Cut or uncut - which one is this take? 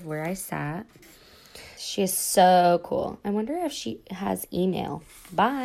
cut